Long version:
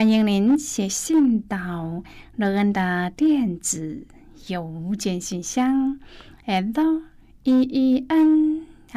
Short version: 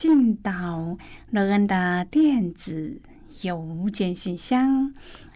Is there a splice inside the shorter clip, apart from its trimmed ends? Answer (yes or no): no